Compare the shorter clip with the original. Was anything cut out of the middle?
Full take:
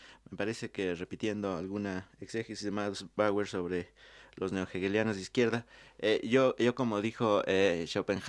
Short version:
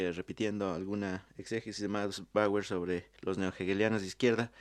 yes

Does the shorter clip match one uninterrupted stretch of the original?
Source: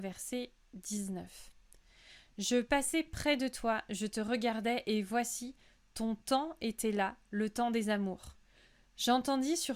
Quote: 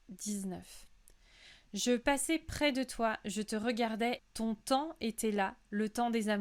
no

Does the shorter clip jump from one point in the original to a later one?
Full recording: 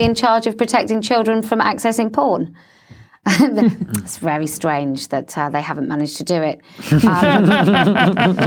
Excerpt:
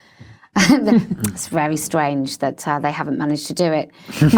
no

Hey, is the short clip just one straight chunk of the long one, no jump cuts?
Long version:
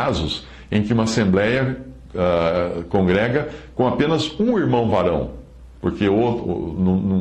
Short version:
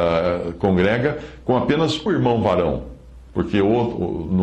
no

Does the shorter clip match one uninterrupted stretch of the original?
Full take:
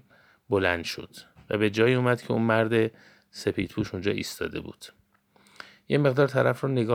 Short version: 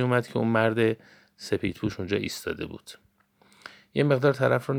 yes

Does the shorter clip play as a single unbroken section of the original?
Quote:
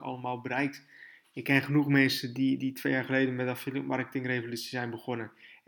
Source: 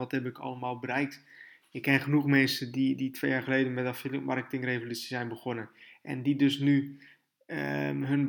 yes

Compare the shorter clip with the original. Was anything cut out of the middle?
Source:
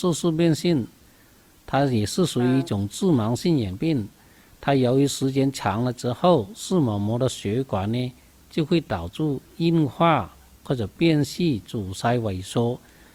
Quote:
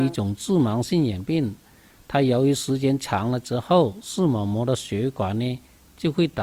no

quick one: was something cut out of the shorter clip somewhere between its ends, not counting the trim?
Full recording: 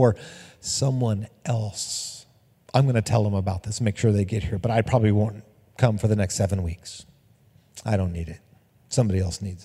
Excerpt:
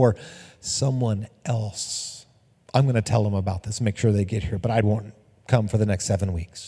yes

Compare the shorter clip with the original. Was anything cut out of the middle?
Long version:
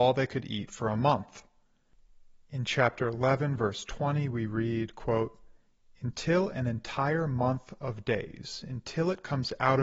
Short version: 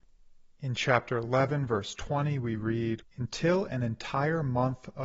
yes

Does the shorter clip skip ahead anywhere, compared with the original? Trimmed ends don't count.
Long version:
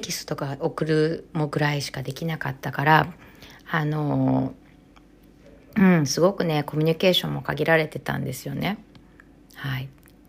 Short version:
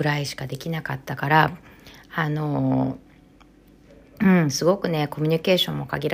no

